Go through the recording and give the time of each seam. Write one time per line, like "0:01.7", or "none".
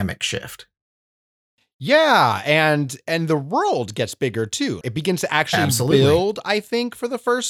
0:04.8